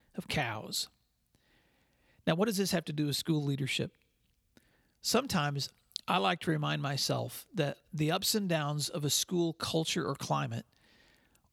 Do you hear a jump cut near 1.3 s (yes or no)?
no